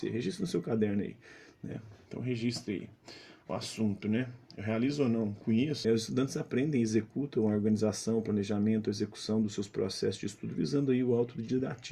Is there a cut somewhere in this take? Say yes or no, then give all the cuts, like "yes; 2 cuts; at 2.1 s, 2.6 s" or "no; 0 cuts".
yes; 1 cut; at 5.8 s